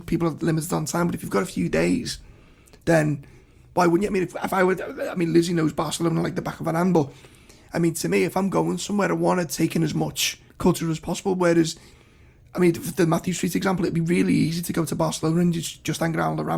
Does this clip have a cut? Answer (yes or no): yes